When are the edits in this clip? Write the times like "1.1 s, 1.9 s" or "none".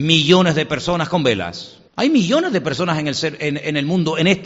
1.9 s

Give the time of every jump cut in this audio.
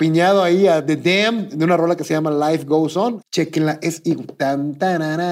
3.2 s

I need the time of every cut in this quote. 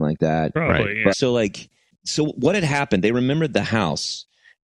1.1 s

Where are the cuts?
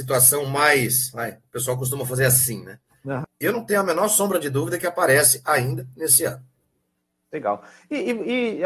3.2 s

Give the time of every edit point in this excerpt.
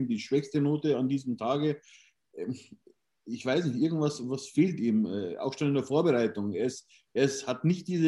none

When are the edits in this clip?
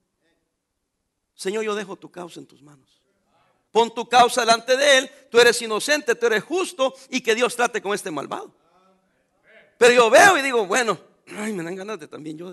3.7 s

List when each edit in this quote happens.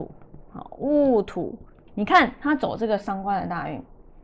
1.9 s

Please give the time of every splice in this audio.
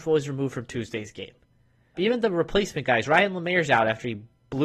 1.9 s

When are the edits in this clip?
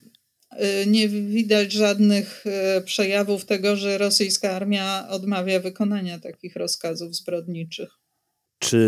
none

